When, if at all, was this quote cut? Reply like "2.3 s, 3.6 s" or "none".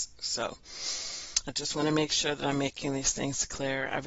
none